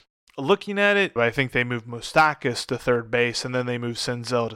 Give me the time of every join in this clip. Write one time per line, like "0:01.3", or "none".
0:01.2